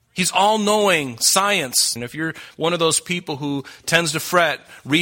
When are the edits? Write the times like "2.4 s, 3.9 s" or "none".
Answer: 2.0 s